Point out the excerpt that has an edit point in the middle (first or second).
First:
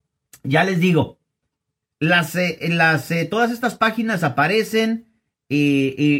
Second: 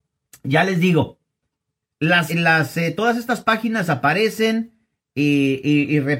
second